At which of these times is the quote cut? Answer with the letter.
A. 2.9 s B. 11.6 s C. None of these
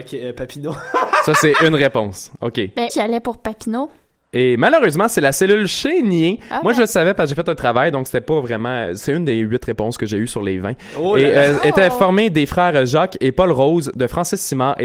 A